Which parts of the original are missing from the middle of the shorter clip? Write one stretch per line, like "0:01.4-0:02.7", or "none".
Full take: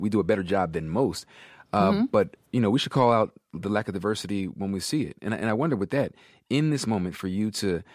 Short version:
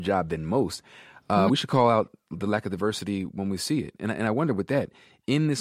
0:01.9-0:02.7